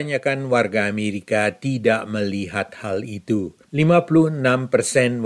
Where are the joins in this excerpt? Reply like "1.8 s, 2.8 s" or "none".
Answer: 3.7 s